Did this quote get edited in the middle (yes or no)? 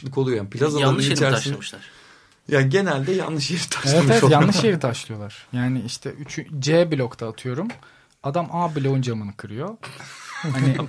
no